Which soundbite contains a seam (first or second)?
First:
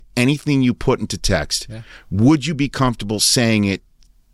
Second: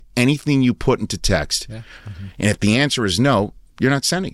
second